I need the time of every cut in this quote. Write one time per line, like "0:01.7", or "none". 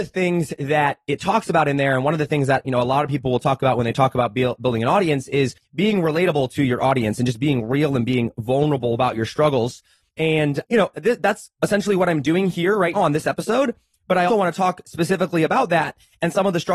0:10.6
0:12.9
0:14.3